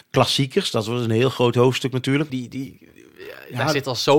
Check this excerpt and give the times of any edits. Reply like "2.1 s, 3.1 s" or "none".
2.3 s